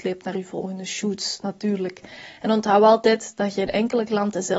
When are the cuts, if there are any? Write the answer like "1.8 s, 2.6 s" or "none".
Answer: none

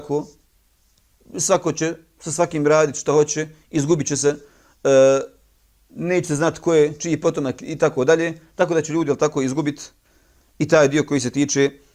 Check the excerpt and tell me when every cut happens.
none

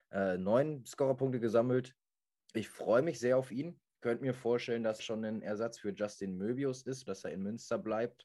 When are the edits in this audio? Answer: 5.0 s, 7.1 s

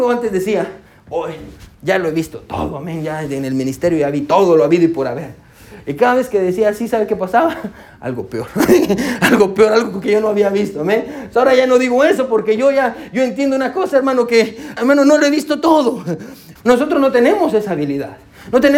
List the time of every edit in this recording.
14.8 s, 16.6 s

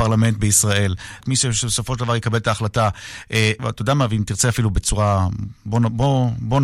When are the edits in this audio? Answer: 1.2 s, 3.6 s

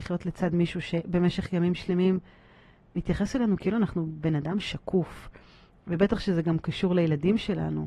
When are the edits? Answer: none

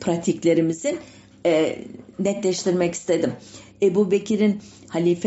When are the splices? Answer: 3.7 s

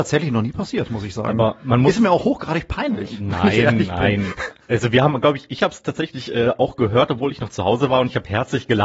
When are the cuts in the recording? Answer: none

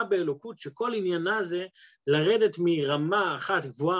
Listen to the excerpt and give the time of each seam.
none

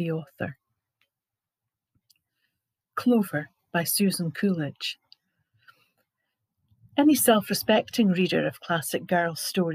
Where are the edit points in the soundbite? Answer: none

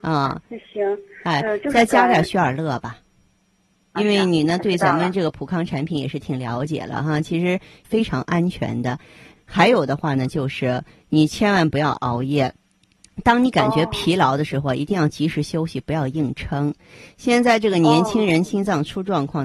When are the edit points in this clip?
3.9 s, 9.3 s

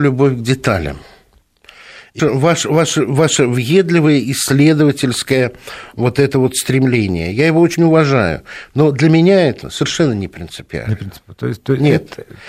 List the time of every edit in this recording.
2.2 s, 9.6 s

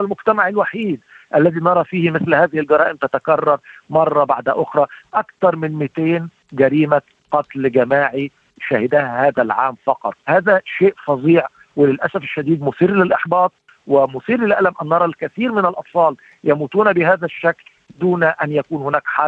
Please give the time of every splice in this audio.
10.2 s

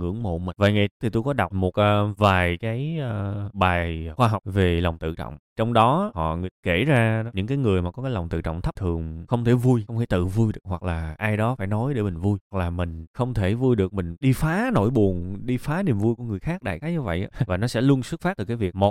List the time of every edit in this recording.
1.5 s, 8.8 s, 17.5 s

